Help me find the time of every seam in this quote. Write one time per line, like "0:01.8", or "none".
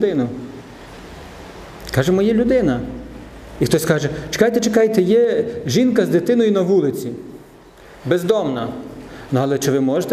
none